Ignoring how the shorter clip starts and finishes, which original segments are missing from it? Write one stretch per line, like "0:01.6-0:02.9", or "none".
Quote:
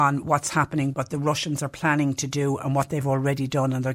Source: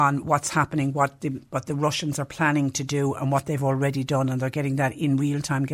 0:00.9-0:01.5